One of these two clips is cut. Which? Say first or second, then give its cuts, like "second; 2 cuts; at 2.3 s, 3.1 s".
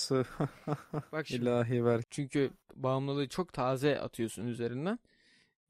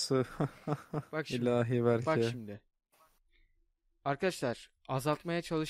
first; 1 cut; at 2.0 s